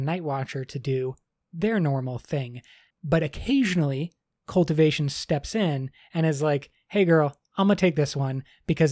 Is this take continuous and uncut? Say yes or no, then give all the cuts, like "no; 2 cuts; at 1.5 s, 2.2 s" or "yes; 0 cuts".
yes; 0 cuts